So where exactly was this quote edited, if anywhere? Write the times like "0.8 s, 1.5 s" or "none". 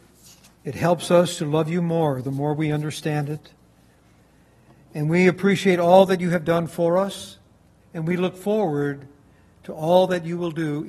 7.8 s